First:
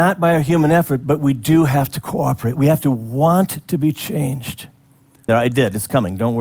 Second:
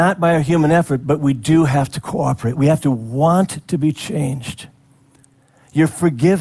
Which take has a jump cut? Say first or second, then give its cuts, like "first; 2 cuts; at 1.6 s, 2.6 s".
first; 1 cut; at 5.3 s